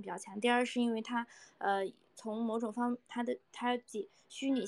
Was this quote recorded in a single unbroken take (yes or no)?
no